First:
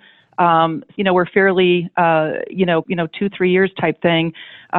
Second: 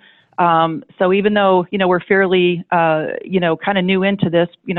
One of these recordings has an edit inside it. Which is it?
first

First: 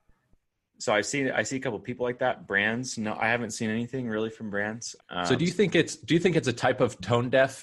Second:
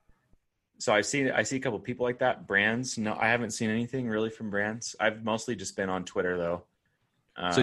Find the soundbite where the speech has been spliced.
first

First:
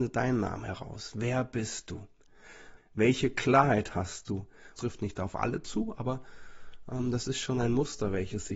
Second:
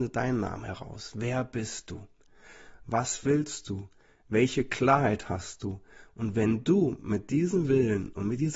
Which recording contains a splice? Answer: first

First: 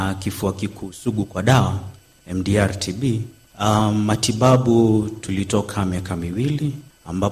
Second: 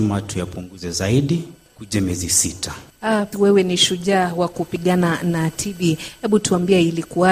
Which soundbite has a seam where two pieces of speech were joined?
second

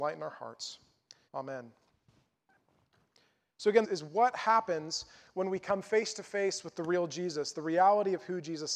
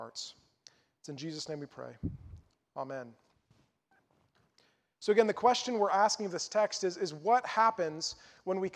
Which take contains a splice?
first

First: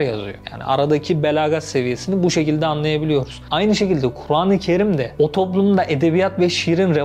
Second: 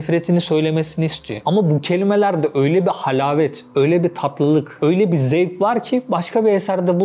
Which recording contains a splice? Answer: second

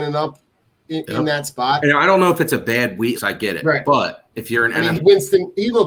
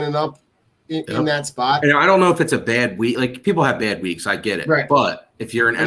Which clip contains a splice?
first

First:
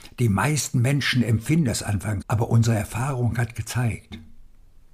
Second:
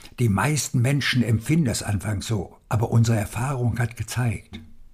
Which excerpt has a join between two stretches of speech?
first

